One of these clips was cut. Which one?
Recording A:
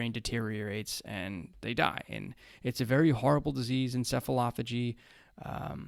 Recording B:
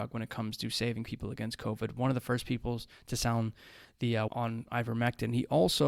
B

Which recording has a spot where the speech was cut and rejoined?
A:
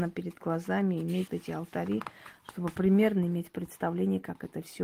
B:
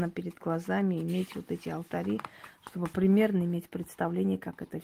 A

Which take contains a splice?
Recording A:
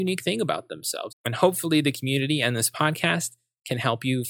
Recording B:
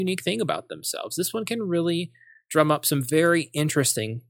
A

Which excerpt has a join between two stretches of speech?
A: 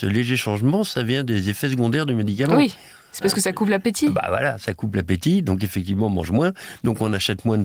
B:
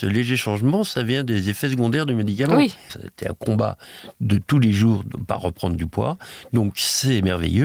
B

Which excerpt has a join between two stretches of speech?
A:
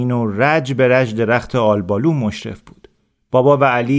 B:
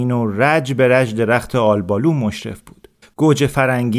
B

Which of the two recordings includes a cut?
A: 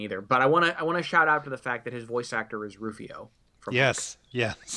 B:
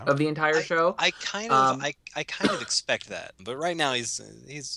B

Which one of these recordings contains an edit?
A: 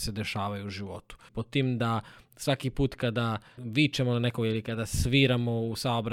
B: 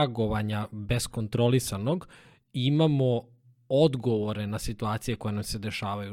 A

